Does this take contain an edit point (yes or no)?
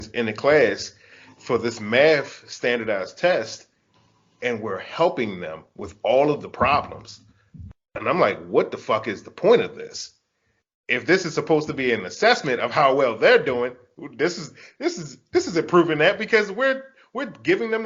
no